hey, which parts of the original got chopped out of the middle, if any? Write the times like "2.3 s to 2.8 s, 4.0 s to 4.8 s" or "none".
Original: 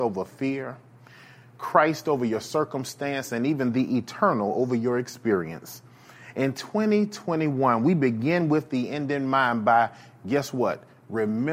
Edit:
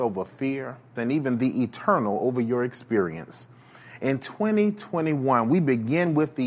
1.0 s to 3.3 s